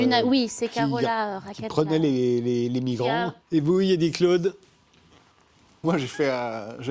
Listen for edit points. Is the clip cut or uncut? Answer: cut